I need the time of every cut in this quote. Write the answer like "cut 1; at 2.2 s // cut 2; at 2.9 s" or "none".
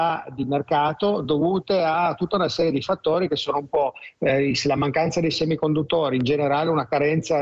none